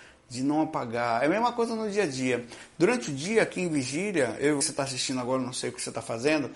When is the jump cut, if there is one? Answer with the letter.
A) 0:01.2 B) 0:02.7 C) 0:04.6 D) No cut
C